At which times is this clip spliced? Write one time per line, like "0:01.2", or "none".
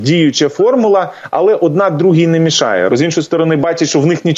0:02.9